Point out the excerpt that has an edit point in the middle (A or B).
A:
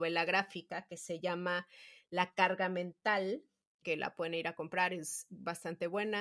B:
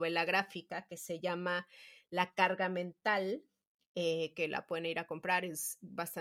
A